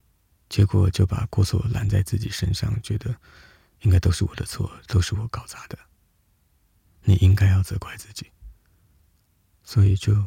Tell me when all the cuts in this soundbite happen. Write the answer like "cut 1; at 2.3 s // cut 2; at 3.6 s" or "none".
cut 1; at 6.9 s